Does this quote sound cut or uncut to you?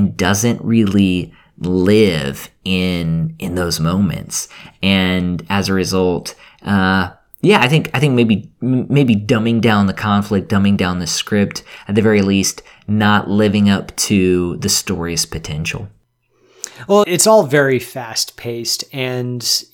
cut